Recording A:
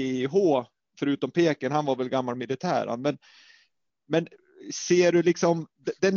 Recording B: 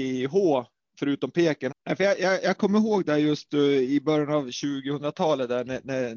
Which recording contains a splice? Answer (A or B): B